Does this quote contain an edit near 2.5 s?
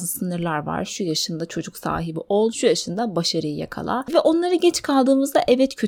yes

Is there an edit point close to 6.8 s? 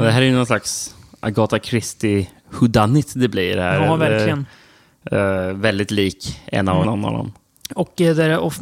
yes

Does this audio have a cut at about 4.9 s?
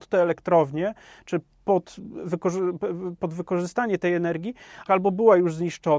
yes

